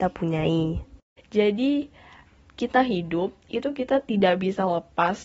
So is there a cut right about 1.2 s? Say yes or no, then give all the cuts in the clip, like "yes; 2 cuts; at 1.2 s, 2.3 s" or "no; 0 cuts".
yes; 1 cut; at 1.2 s